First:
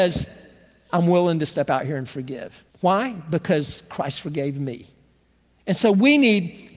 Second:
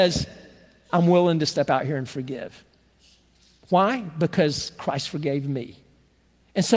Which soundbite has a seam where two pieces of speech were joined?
first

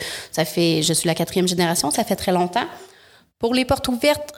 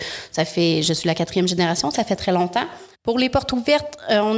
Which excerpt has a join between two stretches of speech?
second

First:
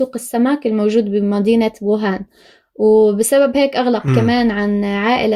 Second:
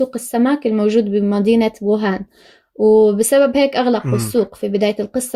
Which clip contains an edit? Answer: first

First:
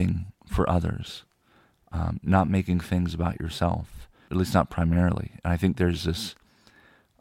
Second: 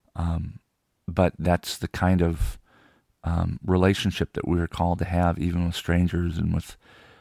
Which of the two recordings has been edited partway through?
first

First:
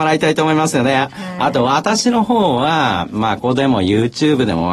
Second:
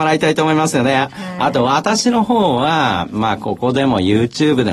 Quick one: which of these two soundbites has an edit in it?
first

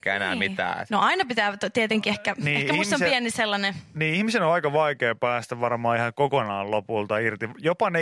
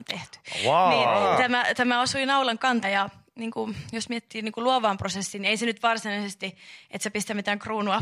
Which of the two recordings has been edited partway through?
second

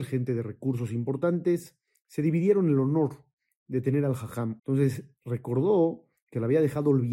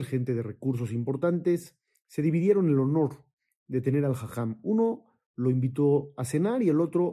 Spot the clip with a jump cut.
first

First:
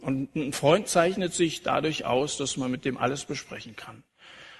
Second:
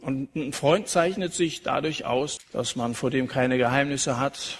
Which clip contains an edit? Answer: second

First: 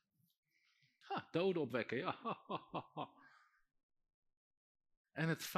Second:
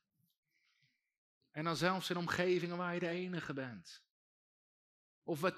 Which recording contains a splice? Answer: first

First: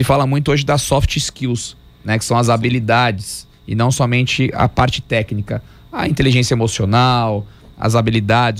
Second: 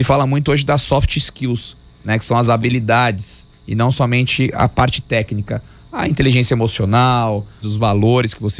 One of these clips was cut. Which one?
second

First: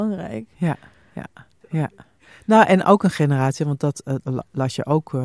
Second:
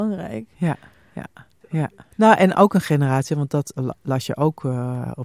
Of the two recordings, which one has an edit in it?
second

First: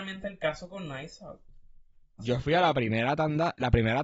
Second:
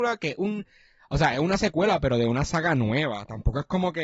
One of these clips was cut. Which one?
first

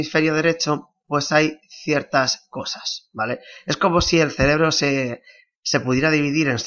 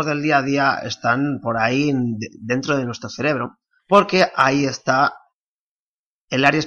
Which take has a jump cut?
second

